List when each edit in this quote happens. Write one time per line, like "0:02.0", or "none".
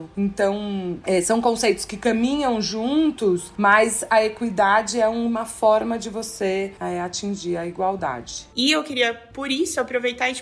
0:08.5